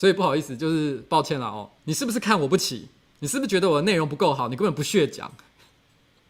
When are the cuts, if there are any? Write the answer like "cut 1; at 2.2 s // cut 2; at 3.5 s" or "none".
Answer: cut 1; at 1.8 s

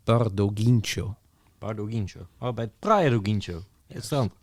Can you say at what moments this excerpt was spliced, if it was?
none

